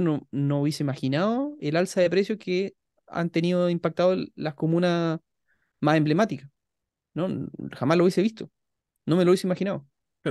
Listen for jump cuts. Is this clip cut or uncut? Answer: uncut